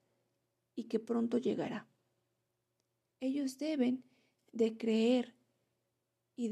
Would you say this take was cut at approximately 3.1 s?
yes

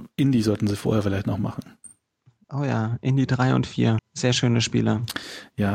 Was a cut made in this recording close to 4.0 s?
yes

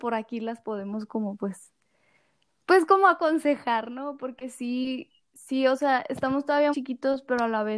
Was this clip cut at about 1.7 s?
no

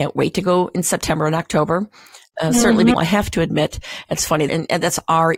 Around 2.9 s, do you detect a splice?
yes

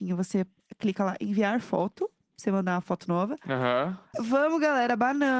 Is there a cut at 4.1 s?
yes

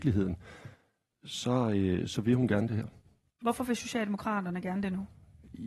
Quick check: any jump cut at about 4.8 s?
no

